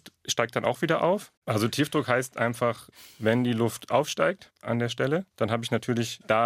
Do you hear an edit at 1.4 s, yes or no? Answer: yes